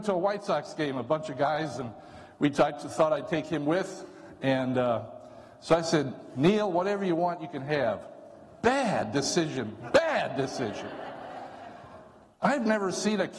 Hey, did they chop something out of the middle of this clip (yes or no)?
no